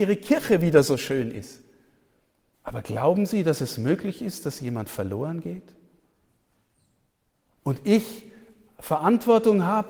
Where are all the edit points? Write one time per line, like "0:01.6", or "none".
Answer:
0:02.5

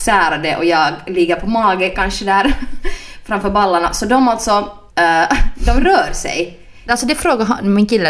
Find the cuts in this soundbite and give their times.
0:04.9
0:06.9

